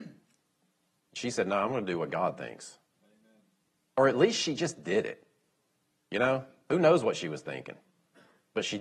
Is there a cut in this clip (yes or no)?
no